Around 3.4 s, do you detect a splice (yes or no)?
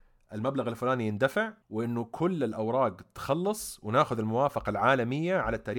no